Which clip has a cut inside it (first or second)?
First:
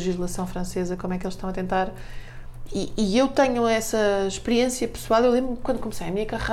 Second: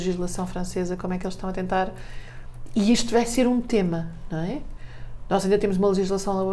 first